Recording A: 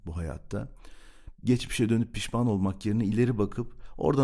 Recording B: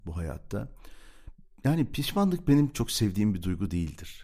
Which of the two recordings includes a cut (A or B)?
A